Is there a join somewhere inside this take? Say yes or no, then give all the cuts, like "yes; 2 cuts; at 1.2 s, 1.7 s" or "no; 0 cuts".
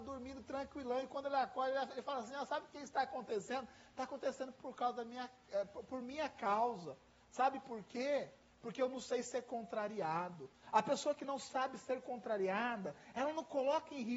no; 0 cuts